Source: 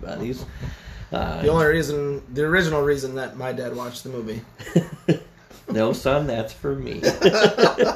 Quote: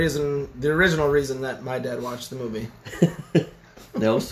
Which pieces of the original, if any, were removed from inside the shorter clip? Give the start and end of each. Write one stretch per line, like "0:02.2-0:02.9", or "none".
none